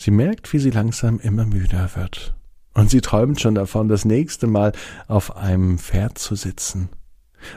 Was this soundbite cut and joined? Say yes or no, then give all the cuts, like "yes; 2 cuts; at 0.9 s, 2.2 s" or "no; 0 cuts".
no; 0 cuts